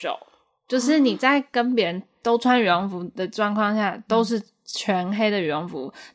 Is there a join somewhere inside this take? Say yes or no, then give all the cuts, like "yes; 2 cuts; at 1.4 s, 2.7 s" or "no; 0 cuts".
no; 0 cuts